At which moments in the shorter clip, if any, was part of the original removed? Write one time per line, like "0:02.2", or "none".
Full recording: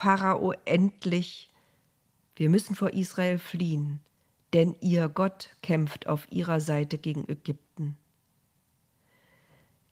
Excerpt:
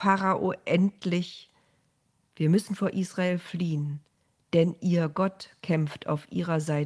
none

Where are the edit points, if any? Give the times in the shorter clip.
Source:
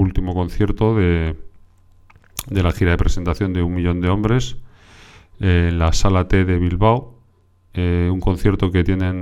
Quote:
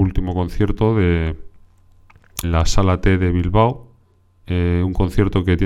0:02.4

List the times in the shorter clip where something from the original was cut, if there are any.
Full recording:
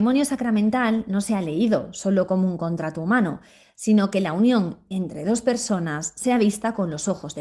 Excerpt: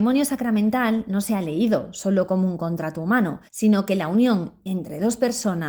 0:03.5

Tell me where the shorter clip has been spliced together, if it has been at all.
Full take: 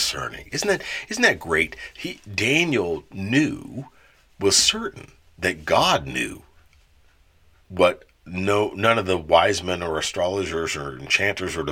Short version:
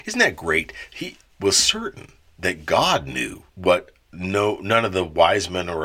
0:01.2
0:03.5

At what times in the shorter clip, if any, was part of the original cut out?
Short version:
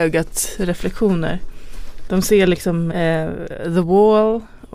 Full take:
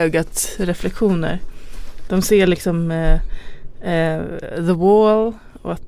0:02.9

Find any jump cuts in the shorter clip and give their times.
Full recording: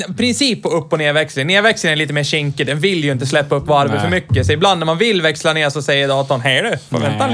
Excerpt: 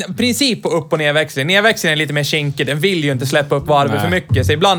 none

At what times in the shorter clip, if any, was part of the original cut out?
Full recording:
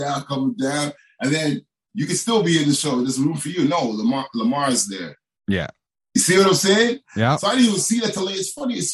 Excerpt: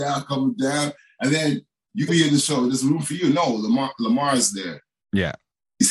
0:02.1

